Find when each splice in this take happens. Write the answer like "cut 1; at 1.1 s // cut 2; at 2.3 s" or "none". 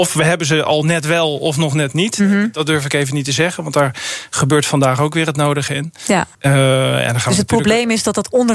cut 1; at 6.3 s